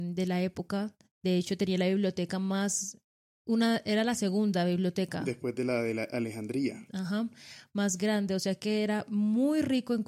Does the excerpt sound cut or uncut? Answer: uncut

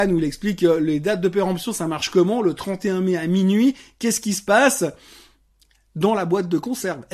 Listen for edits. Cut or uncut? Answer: uncut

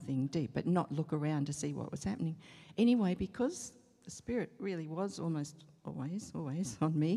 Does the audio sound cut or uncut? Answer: uncut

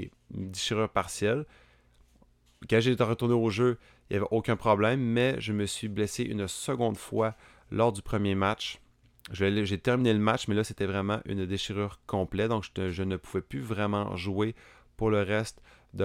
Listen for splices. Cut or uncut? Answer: uncut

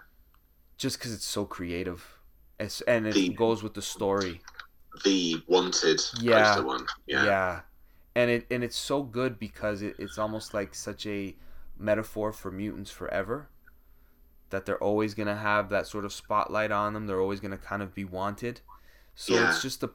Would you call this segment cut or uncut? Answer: uncut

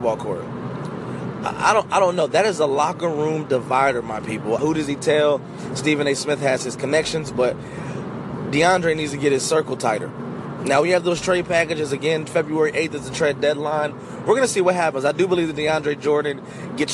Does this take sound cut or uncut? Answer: cut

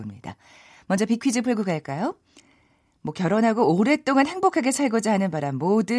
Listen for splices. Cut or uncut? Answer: uncut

